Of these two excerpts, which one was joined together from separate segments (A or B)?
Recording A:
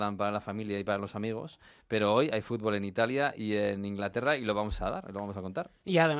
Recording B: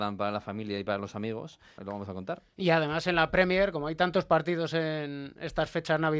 B